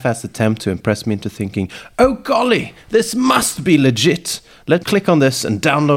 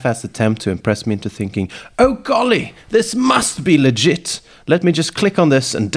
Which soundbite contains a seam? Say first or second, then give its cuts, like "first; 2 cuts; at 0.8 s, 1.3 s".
first; 1 cut; at 4.8 s